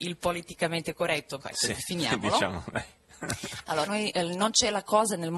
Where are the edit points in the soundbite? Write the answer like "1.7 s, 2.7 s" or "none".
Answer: 1.4 s, 3.9 s